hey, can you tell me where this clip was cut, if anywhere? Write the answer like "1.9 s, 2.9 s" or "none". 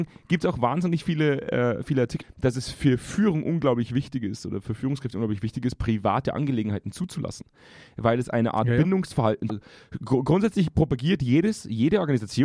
2.2 s, 9.5 s

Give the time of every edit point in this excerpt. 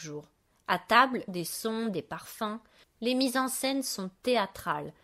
1.3 s, 2.8 s

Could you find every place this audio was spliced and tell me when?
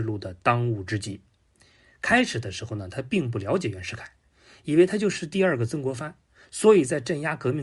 6.4 s

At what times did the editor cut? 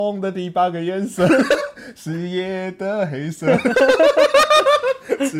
1.6 s

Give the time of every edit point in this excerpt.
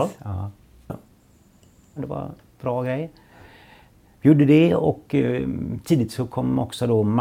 2.0 s

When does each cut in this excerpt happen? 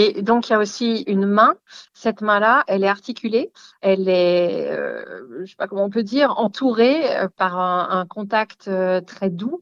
3.7 s

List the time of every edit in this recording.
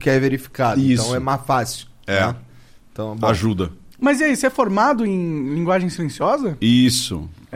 none

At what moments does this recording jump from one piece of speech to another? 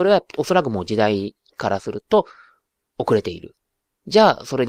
none

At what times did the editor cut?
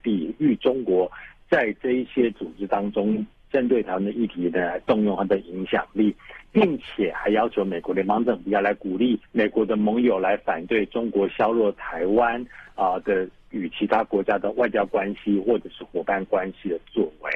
9.3 s

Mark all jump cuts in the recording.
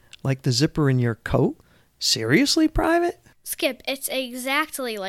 none

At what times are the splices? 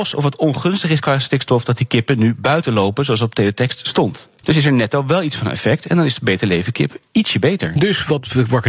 4.4 s

